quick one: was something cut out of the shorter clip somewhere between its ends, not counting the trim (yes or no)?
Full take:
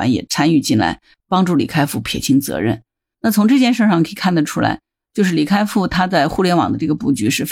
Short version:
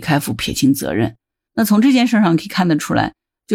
no